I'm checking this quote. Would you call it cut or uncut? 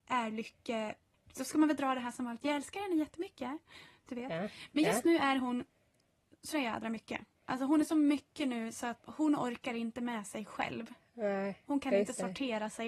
cut